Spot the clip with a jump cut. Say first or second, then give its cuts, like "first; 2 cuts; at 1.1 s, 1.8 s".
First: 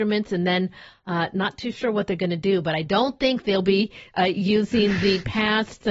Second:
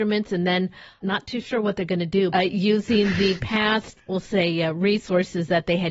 second; 3 cuts; at 1.0 s, 2.3 s, 4.0 s